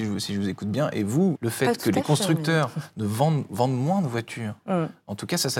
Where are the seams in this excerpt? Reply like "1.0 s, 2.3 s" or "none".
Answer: 1.4 s